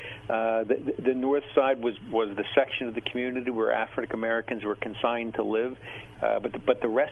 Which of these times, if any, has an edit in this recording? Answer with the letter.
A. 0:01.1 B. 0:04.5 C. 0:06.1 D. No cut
C